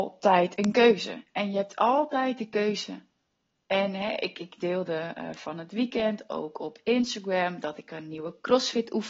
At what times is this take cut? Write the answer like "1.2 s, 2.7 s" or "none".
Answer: none